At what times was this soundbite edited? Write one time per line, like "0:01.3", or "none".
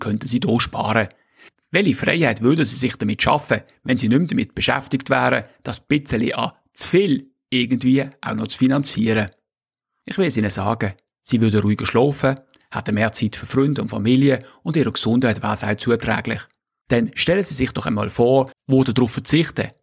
0:16.8
0:18.5